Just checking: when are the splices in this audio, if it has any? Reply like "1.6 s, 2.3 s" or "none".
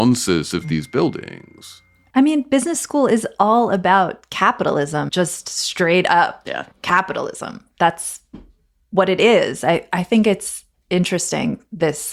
5.1 s, 6.7 s